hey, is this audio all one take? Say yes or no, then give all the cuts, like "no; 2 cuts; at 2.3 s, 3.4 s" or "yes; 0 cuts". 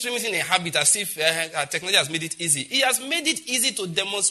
yes; 0 cuts